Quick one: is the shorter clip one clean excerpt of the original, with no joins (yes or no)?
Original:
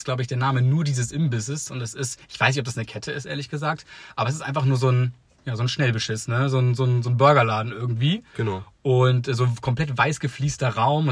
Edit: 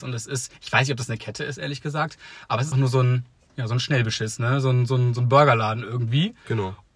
no